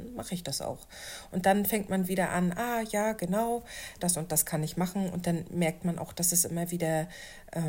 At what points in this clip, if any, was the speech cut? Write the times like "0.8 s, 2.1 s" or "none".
4.0 s